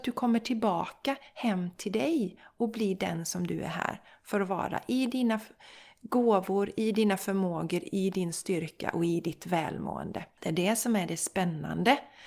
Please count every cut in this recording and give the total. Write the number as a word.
zero